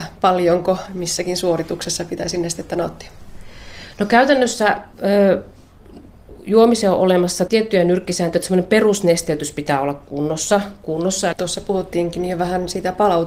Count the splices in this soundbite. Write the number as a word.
two